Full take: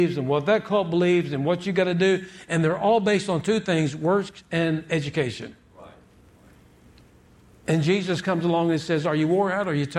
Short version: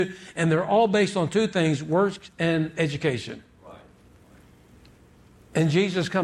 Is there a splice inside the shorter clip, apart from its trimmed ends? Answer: no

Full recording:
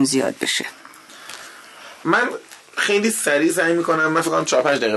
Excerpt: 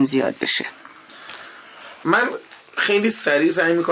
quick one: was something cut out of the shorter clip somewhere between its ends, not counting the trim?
no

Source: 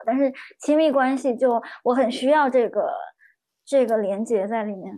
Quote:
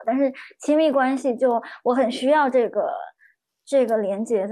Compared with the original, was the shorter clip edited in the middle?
no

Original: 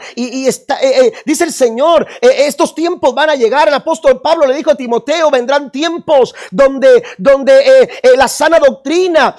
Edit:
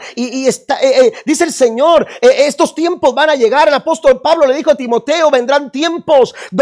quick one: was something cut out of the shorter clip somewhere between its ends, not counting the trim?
no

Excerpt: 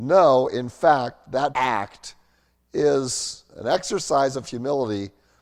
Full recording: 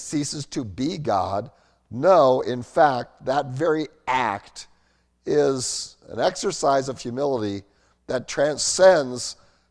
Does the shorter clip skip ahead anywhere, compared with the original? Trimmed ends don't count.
yes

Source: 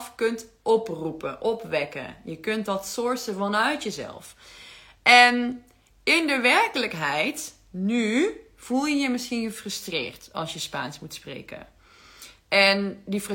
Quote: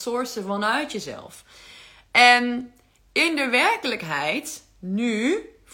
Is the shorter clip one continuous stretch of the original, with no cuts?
yes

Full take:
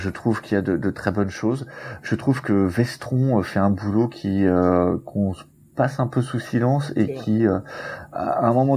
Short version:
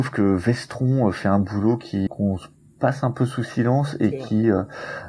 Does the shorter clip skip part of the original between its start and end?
yes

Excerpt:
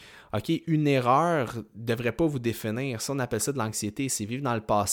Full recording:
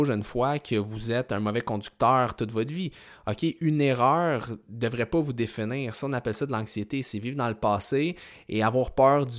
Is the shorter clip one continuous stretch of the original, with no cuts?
yes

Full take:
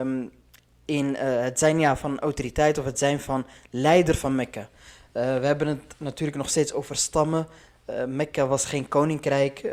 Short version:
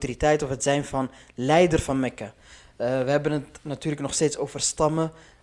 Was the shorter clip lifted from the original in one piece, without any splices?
yes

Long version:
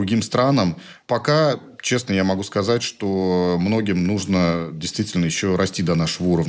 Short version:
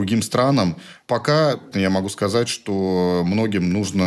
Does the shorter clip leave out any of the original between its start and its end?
yes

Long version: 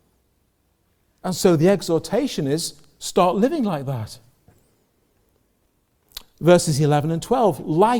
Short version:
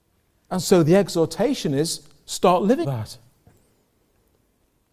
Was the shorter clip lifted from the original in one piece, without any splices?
no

